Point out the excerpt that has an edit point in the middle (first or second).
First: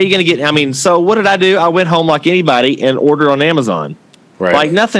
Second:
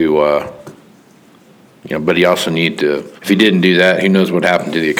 second